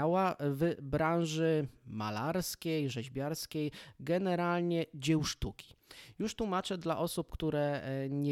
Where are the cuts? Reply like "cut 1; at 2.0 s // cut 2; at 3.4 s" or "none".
none